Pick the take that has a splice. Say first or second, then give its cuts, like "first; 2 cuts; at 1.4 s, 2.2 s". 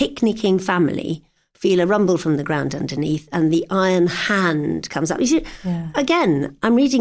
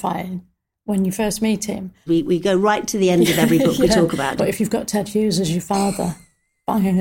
second; 2 cuts; at 2.1 s, 4.4 s